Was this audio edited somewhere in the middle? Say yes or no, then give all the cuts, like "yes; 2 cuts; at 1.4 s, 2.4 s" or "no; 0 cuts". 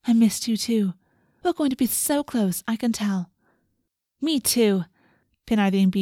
no; 0 cuts